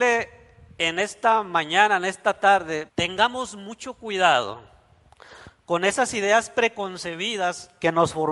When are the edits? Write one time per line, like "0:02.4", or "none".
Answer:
0:02.9